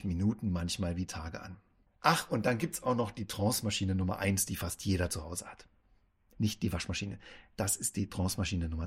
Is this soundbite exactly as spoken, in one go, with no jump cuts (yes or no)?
no